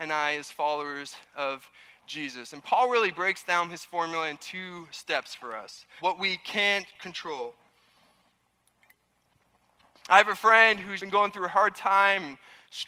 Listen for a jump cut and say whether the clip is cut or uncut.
cut